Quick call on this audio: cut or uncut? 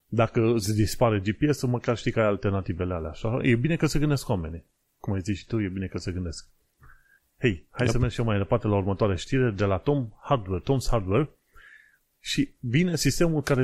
uncut